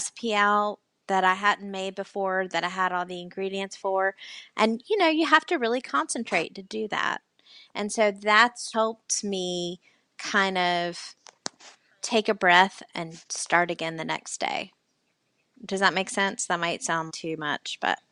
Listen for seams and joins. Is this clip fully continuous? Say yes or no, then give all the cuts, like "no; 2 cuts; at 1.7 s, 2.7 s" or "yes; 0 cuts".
no; 3 cuts; at 8.7 s, 15.6 s, 17.1 s